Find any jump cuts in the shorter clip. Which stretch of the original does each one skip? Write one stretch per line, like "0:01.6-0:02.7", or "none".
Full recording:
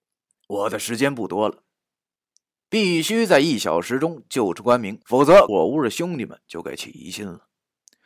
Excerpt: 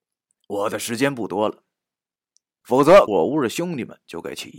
0:02.6-0:05.0